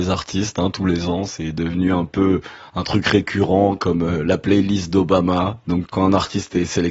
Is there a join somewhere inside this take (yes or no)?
yes